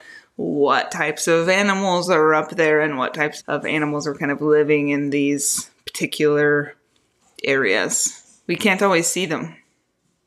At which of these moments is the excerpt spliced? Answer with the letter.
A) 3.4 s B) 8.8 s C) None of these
A